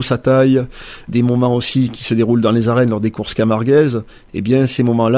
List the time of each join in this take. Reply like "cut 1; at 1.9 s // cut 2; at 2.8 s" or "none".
cut 1; at 1.1 s